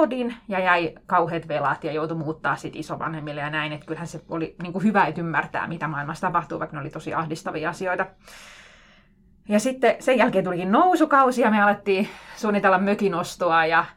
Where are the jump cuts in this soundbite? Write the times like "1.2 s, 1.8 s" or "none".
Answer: none